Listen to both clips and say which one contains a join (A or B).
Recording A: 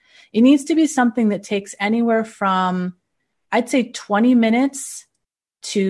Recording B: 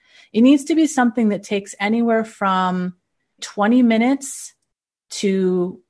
B